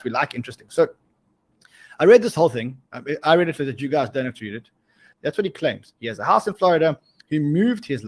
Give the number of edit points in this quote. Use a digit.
2